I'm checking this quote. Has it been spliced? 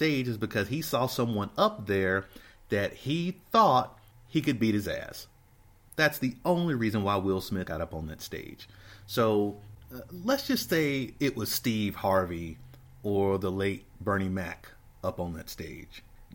yes; 1 cut; at 7.7 s

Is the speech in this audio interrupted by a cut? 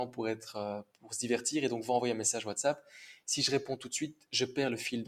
no; 0 cuts

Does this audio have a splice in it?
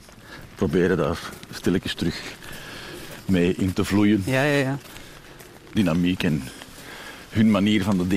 yes; 1 cut; at 5.8 s

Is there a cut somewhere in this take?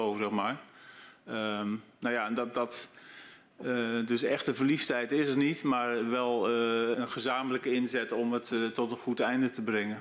yes; 1 cut; at 6.9 s

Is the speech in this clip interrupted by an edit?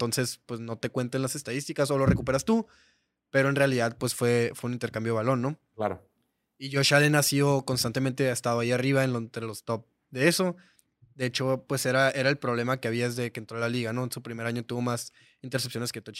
no; 0 cuts

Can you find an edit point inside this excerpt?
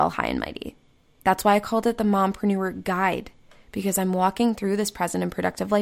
no; 0 cuts

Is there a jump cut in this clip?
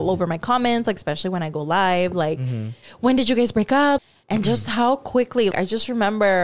yes; 2 cuts; at 4.0 s, 5.5 s

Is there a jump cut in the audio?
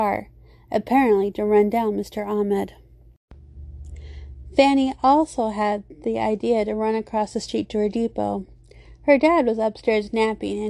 no; 0 cuts

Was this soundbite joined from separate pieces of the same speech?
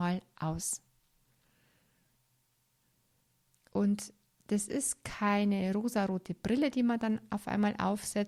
no; 0 cuts

